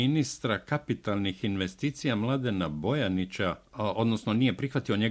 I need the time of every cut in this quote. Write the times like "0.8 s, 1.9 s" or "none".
3.6 s